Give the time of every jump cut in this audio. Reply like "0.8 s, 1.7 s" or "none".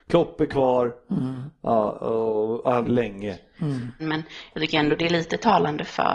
2.8 s, 4.0 s